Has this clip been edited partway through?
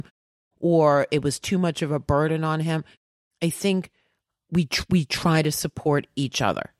no; 0 cuts

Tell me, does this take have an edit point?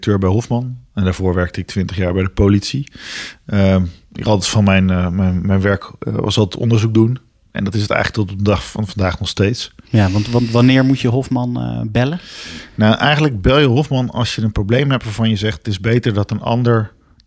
yes; 1 cut; at 9.8 s

